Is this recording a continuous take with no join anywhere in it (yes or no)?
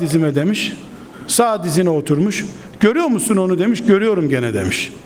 yes